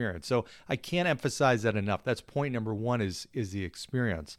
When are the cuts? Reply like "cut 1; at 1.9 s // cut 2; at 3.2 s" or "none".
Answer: none